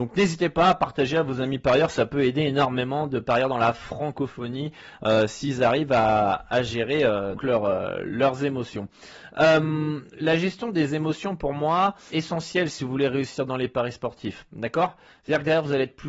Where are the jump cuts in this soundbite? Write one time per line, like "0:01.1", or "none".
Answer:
0:07.4
0:12.1
0:14.5